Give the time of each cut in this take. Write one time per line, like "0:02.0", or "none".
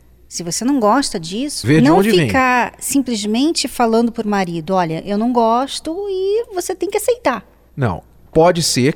0:01.6